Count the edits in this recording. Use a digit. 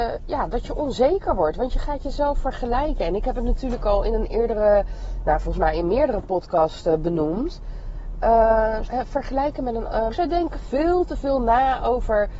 2